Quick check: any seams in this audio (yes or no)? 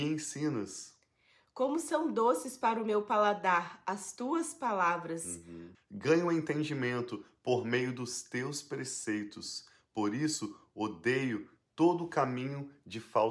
yes